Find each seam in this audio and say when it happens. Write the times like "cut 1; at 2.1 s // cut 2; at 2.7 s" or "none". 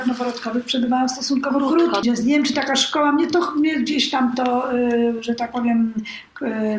cut 1; at 2.0 s